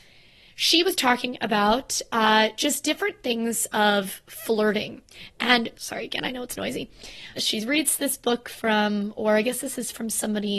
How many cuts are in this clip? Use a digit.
2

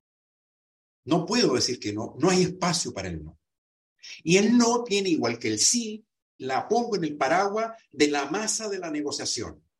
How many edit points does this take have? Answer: 1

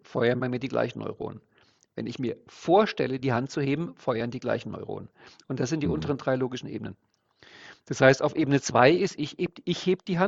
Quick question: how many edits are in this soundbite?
0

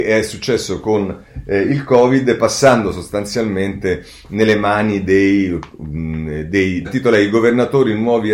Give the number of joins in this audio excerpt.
1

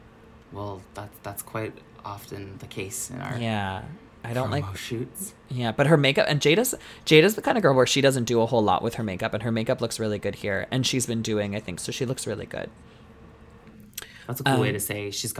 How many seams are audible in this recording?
1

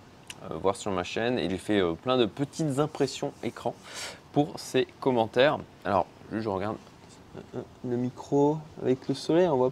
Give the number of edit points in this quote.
1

